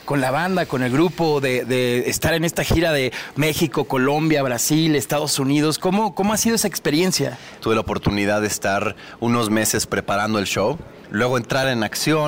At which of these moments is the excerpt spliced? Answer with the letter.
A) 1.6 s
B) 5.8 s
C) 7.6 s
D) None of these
C